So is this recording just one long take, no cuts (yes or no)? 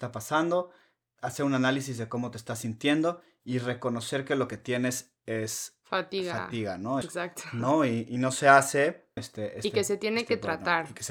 no